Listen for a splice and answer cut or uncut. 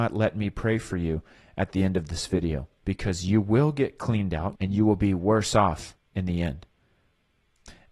cut